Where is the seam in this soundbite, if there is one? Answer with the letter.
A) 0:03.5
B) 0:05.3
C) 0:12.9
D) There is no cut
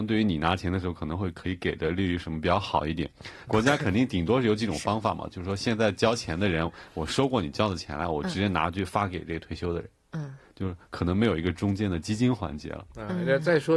A